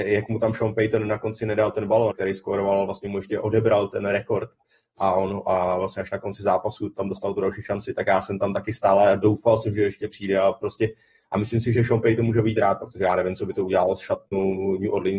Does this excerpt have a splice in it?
yes; 1 cut; at 2.1 s

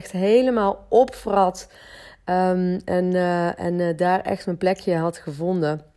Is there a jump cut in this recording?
no; 0 cuts

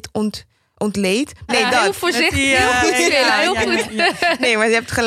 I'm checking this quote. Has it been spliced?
yes; 1 cut; at 1.5 s

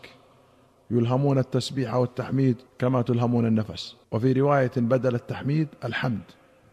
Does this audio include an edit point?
yes; 2 cuts; at 2.7 s, 4.0 s

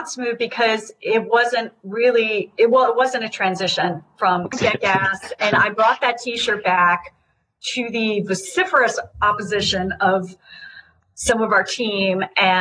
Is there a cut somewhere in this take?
yes; 1 cut; at 4.5 s

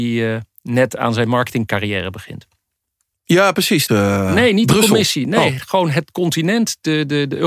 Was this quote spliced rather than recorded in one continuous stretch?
yes; 1 cut; at 3.9 s

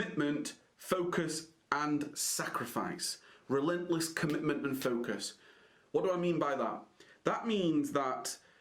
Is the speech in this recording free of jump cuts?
yes; 0 cuts

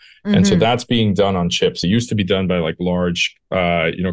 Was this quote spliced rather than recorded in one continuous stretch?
no; 0 cuts

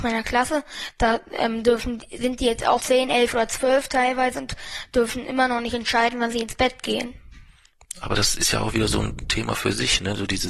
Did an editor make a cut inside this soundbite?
yes; 2 cuts; at 2.8 s, 7.9 s

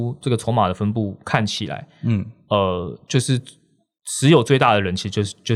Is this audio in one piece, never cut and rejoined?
yes; 0 cuts

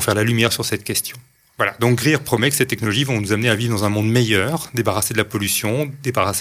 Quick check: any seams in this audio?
yes; 1 cut; at 1.5 s

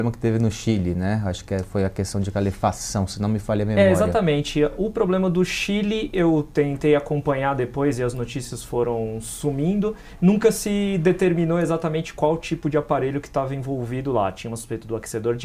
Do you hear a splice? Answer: no; 0 cuts

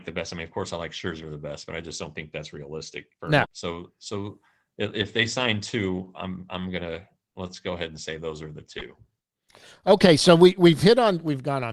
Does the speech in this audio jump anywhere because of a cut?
yes; 1 cut; at 3.4 s

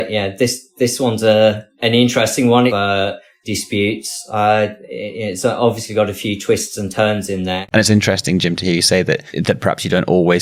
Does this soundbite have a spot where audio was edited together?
yes; 2 cuts; at 2.7 s, 7.7 s

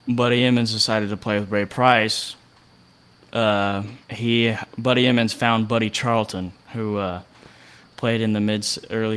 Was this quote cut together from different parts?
yes; 2 cuts; at 4.0 s, 6.6 s

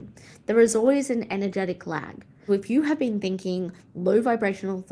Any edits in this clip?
yes; 1 cut; at 2.5 s

